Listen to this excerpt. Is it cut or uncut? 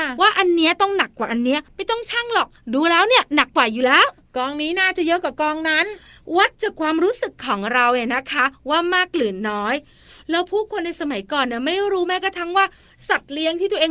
uncut